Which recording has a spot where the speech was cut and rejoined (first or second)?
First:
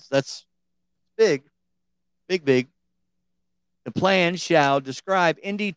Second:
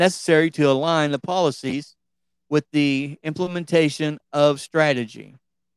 first